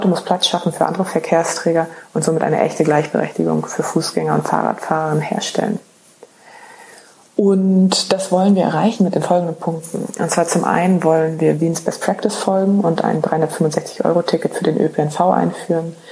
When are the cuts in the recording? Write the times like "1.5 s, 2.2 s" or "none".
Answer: none